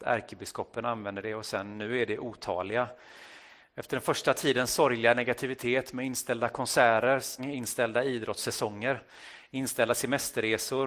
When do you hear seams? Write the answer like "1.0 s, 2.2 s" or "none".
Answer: 3.6 s, 7.4 s